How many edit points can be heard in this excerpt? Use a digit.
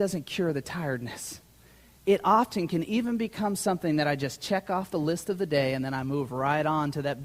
1